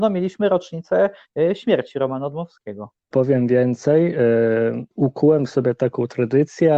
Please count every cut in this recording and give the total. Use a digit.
2